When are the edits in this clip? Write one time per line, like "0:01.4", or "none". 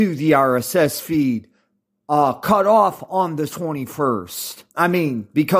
0:04.7

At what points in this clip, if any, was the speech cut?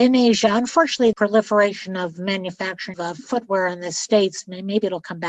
0:01.1
0:02.9

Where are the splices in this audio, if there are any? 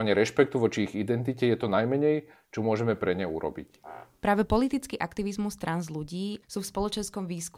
0:06.4

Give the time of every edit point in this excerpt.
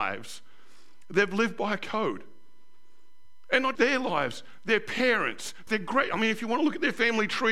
0:03.7
0:05.7

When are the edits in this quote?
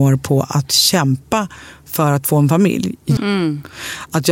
0:03.2

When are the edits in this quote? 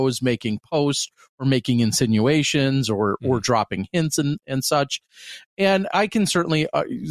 0:05.9

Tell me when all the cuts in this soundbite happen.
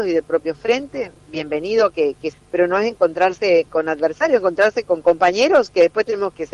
0:02.3
0:03.7

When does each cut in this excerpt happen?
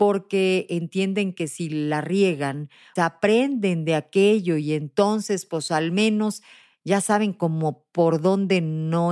0:03.0

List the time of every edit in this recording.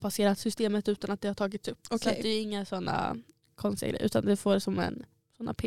0:01.8

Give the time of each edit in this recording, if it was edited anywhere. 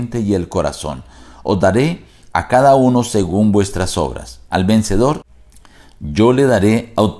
0:04.5

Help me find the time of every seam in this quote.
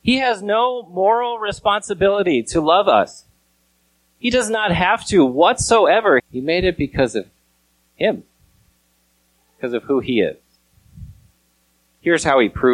0:06.2

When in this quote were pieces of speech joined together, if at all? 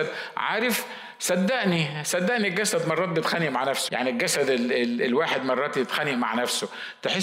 0:03.9

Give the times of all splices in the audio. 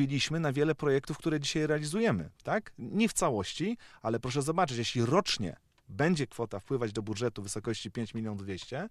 none

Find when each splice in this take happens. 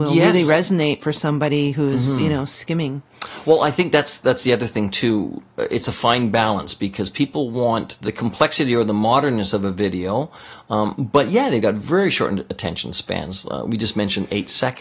none

